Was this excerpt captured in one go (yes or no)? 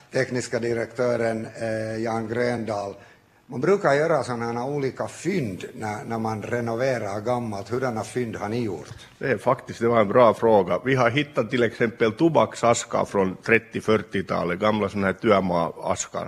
yes